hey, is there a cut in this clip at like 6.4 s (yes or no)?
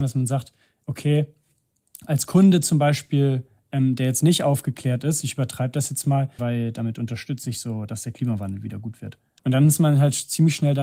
yes